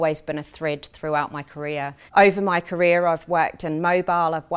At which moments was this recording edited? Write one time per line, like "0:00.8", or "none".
0:02.1